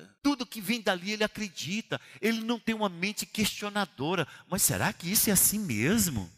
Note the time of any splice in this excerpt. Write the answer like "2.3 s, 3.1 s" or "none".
none